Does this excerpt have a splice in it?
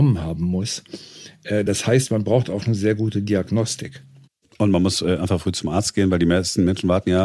no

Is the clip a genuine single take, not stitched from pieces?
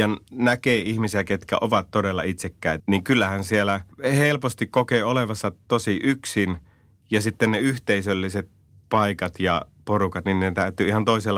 no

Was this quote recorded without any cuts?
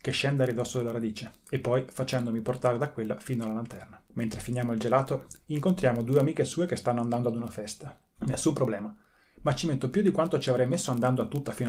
no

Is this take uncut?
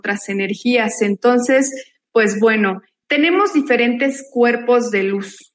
no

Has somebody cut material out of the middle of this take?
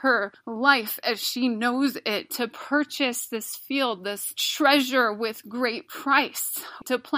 no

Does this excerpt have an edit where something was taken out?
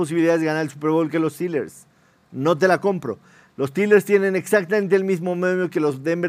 no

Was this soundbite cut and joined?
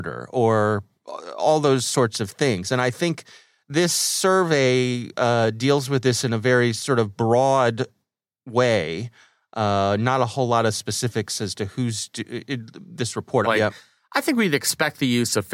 yes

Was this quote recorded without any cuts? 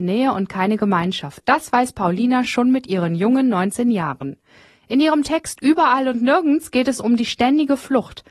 yes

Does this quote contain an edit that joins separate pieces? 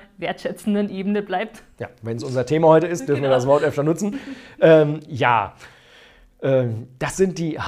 no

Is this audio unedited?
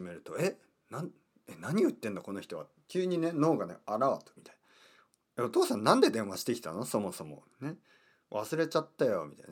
no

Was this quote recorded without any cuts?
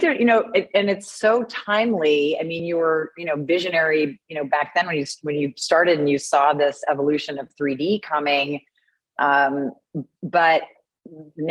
yes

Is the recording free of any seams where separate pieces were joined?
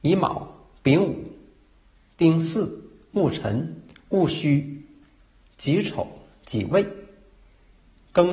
yes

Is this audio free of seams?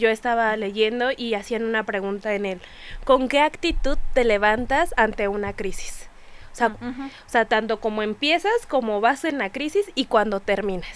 no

